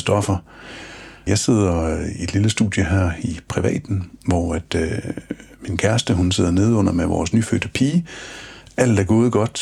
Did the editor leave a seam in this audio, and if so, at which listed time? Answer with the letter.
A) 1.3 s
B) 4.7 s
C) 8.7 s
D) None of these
A